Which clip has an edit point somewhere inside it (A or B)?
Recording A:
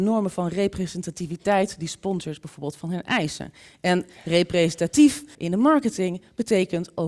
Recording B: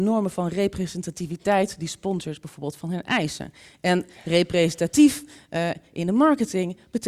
A